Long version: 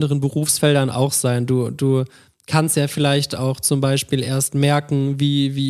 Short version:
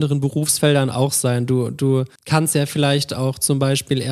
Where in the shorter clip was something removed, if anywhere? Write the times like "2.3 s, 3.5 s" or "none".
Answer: 2.2 s